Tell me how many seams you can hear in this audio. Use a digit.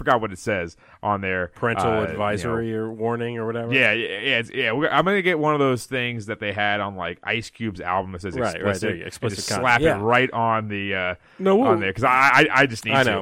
0